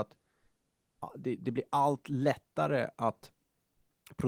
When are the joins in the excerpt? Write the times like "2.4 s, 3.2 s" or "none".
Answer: none